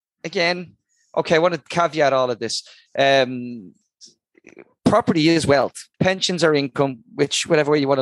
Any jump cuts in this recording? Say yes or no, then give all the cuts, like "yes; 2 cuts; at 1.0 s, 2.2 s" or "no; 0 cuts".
yes; 1 cut; at 5.9 s